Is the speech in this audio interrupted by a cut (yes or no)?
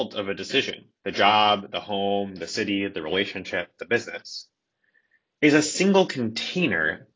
yes